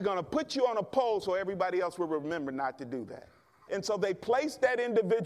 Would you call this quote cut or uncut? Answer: cut